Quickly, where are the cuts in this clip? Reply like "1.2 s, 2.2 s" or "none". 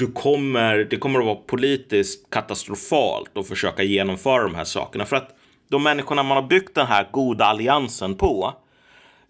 none

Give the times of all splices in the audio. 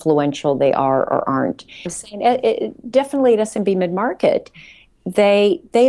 1.9 s

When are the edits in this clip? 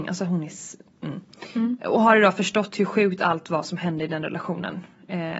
none

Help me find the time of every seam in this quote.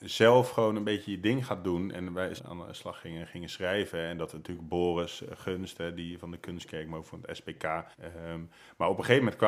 2.4 s, 7.9 s

